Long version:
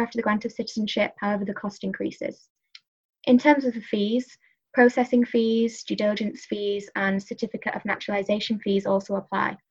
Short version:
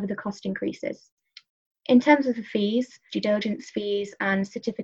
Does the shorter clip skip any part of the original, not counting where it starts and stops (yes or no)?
yes